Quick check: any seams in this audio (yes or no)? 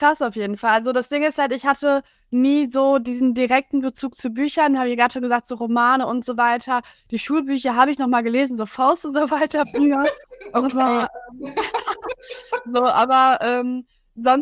no